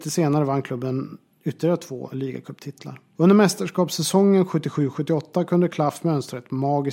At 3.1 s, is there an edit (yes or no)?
no